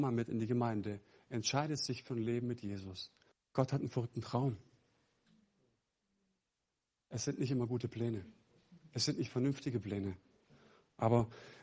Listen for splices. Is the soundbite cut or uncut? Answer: cut